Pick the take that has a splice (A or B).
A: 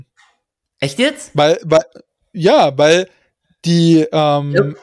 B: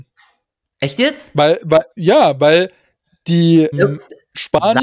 B